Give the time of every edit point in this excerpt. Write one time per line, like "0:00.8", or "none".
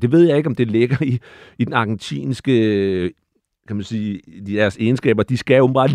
none